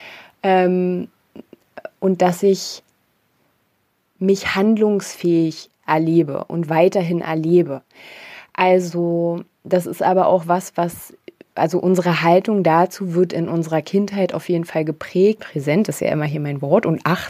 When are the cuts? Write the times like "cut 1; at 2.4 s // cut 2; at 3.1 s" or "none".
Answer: cut 1; at 15.4 s